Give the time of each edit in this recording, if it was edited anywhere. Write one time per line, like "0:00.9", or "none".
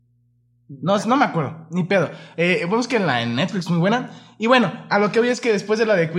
none